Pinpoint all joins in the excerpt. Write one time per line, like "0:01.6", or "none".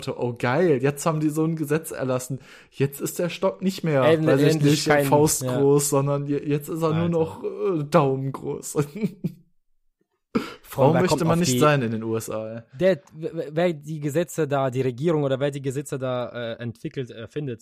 none

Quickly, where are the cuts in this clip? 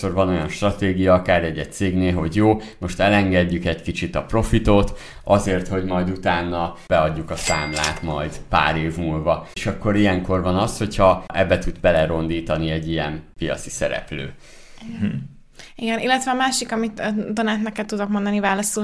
none

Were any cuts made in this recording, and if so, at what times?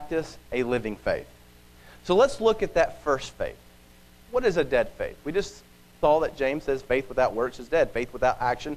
none

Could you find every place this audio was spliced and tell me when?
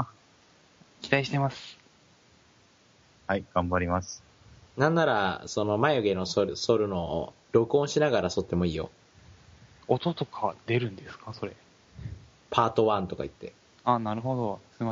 0:12.4

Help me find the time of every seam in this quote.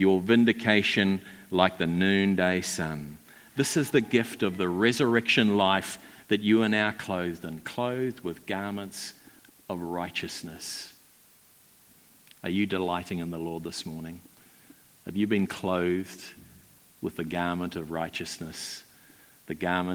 none

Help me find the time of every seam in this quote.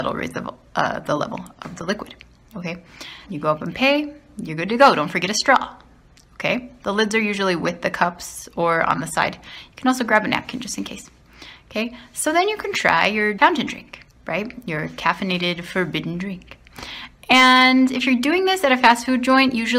0:03.2

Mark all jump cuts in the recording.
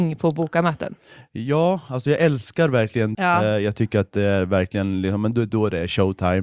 0:03.1

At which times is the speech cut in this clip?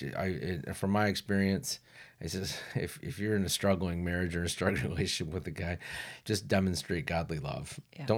0:06.2

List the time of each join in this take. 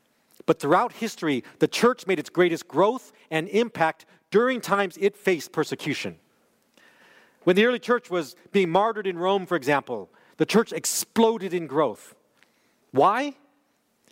none

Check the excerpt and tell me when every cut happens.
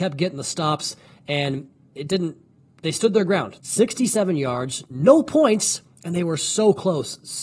0:01.9
0:03.6

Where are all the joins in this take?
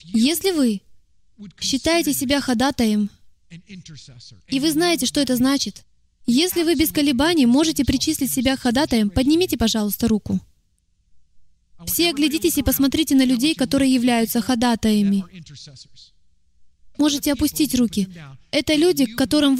0:11.8
0:16.9

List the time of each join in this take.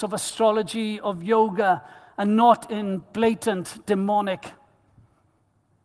none

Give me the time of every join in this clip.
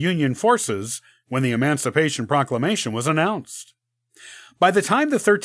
none

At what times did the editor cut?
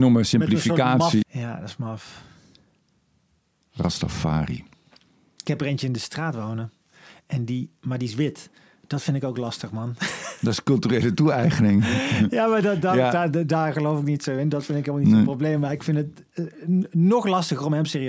0:01.2

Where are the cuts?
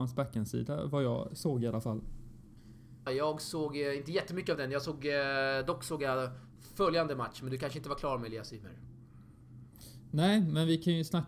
0:03.1

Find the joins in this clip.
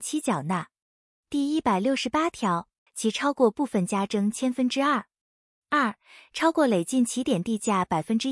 0:02.9

